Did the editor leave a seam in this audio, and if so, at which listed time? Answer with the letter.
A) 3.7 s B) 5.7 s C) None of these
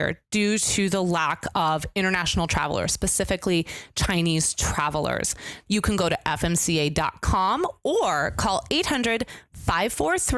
B